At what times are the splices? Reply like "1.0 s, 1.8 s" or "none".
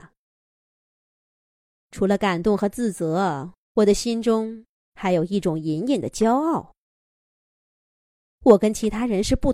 none